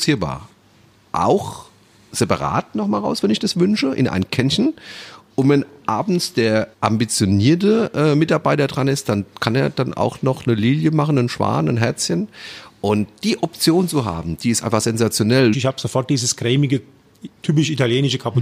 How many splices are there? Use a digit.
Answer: 2